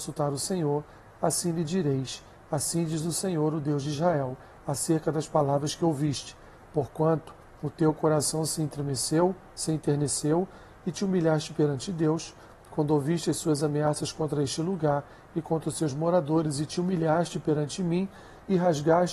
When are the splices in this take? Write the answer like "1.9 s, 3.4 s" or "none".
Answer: none